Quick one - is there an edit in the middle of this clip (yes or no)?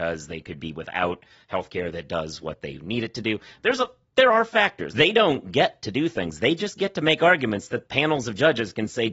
yes